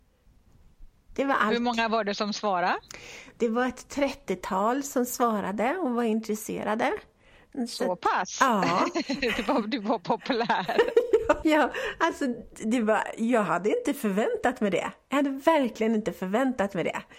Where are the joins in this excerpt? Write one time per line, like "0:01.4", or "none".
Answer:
0:11.4